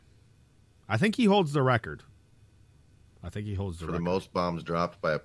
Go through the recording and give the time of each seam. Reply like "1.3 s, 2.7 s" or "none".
none